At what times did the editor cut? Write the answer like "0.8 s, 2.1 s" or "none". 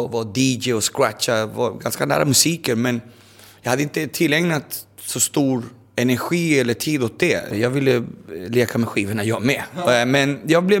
7.5 s

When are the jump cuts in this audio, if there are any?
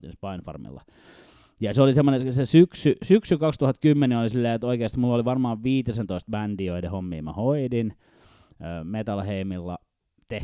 none

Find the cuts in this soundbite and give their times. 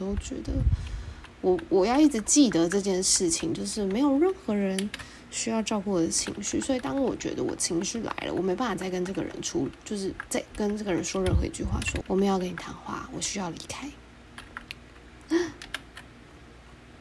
10.5 s, 12.0 s, 15.3 s

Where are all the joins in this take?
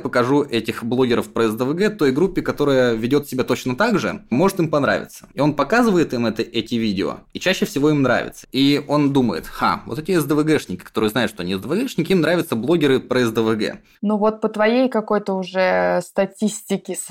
8.4 s, 14.0 s

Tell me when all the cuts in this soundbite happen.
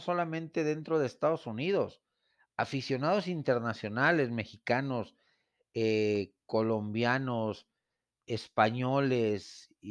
none

